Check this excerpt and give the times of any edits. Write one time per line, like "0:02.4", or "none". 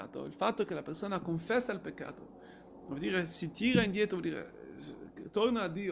none